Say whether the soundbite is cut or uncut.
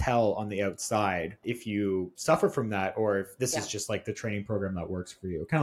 cut